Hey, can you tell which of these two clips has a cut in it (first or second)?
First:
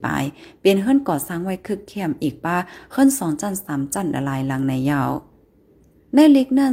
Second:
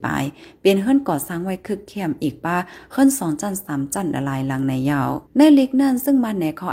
second